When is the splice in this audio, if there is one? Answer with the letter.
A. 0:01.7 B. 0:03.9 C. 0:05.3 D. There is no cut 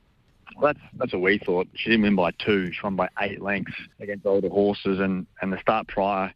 B